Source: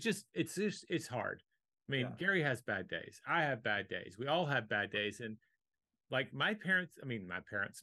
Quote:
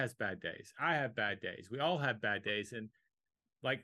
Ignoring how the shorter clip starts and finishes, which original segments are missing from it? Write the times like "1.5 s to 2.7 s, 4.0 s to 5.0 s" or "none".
none